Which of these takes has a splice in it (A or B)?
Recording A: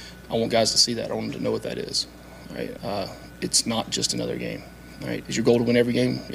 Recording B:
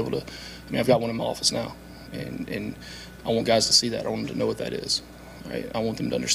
A